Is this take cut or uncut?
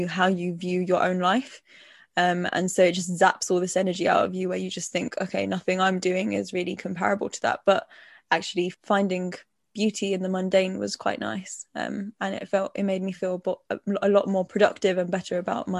uncut